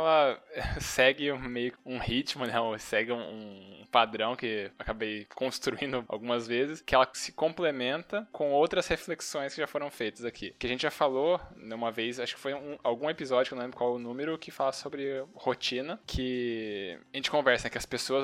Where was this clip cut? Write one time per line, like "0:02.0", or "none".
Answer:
none

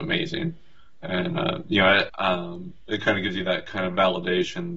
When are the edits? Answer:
0:02.1

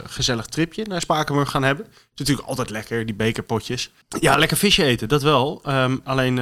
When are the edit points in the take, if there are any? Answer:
0:01.0
0:04.0

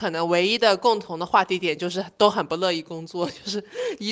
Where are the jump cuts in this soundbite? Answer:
none

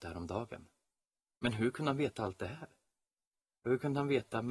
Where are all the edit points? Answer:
none

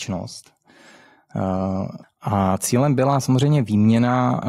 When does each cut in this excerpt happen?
0:02.0

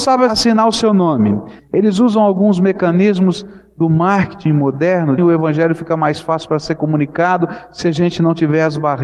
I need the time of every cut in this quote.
0:01.6
0:05.2

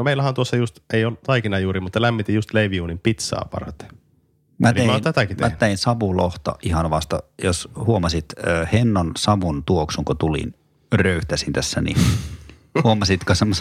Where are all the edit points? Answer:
none

